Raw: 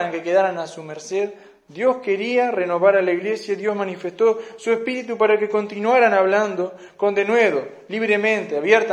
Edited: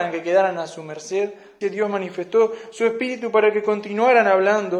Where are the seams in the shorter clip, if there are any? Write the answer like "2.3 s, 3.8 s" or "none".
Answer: 1.6 s